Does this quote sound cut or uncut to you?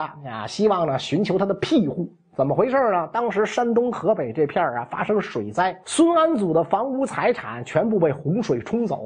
cut